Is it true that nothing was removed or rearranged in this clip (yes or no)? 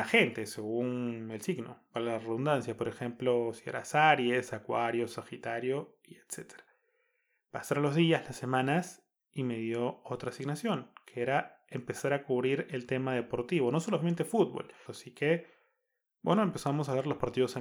no